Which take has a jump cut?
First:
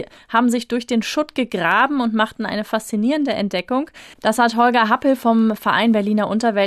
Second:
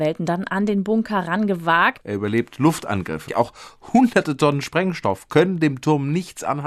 second; 2 cuts; at 2.0 s, 3.3 s

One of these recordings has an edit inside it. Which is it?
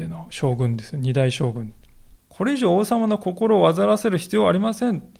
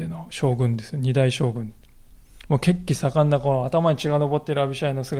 first; 1 cut; at 2.2 s

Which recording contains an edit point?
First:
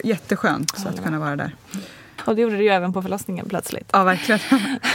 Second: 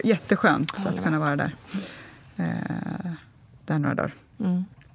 first; 1 cut; at 2.2 s

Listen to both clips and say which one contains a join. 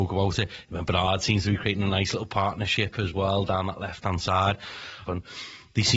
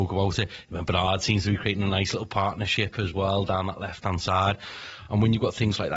first; 1 cut; at 5.0 s

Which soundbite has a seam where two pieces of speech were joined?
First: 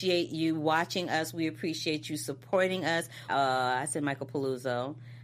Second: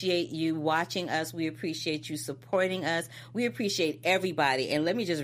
first; 1 cut; at 3.3 s

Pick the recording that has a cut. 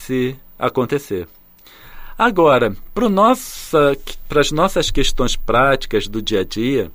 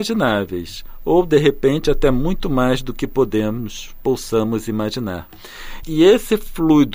second; 1 cut; at 5.8 s

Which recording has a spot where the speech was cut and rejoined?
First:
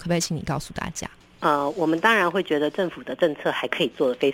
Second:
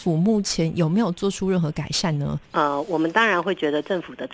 second; 1 cut; at 2.5 s

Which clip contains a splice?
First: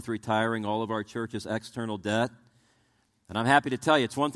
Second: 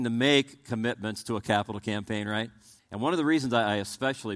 second; 1 cut; at 2.8 s

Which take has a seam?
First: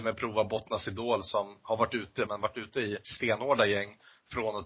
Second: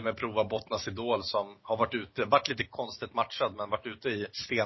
first; 1 cut; at 2.3 s

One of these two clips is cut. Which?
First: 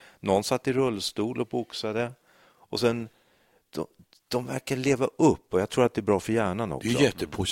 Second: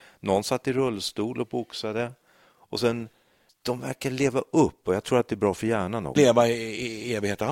second; 2 cuts; at 3.5 s, 6.2 s

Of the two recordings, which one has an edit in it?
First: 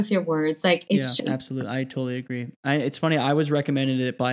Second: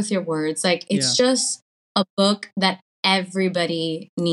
first; 1 cut; at 1.2 s

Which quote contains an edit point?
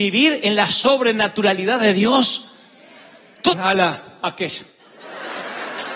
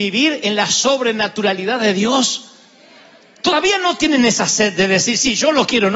first; 1 cut; at 3.5 s

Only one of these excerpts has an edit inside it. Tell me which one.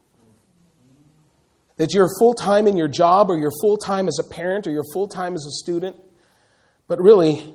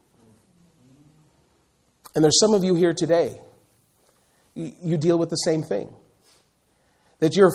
first; 1 cut; at 1.7 s

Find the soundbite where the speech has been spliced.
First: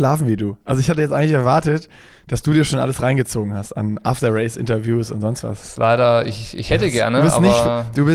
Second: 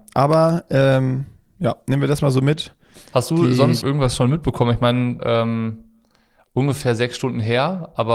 second; 2 cuts; at 3.8 s, 5.2 s

